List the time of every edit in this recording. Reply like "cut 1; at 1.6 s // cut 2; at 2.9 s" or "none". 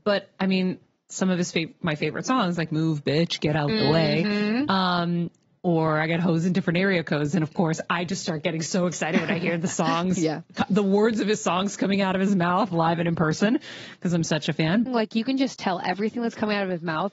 cut 1; at 14.9 s

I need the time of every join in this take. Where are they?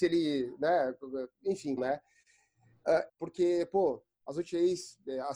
cut 1; at 1.8 s // cut 2; at 3.1 s

